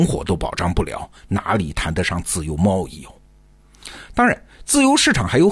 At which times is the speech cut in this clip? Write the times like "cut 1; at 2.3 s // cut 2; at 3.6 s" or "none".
none